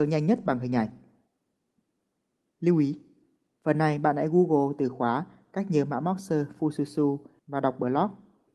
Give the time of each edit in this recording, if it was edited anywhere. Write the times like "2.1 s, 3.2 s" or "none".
none